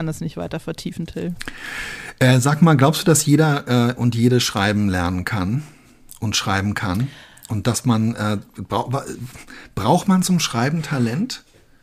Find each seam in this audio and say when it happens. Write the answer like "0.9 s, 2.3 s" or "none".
none